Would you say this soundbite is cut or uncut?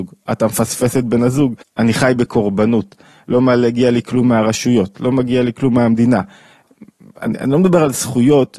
cut